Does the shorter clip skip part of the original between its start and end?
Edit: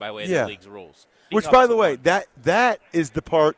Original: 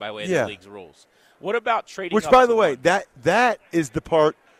yes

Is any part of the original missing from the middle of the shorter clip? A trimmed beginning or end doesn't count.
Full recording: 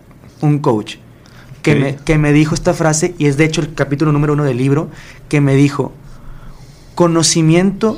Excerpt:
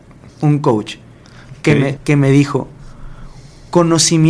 yes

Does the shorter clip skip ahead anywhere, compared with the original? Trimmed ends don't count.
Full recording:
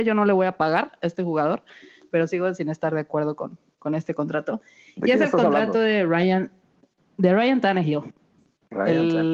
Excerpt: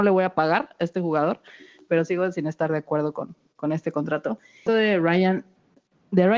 yes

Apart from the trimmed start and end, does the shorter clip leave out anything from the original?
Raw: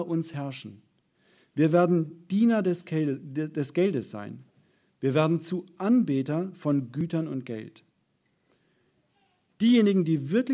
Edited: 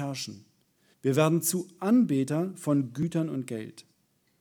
yes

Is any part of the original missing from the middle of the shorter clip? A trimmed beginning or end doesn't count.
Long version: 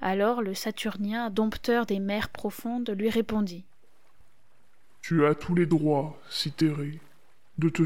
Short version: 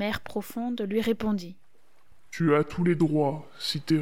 yes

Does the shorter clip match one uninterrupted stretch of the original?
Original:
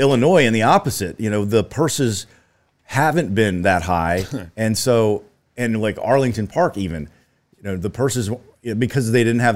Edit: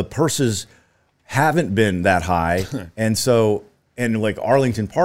yes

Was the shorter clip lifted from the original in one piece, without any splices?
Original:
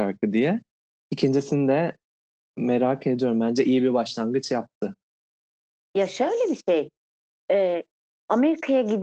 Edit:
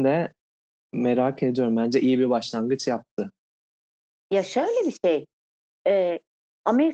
yes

